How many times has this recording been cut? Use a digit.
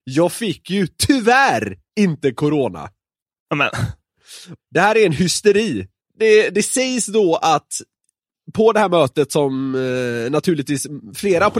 2